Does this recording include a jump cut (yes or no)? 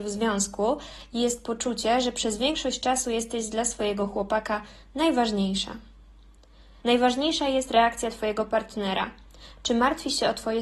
yes